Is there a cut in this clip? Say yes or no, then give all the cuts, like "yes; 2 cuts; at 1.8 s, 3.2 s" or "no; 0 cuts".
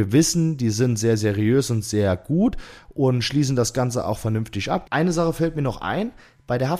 yes; 1 cut; at 4.8 s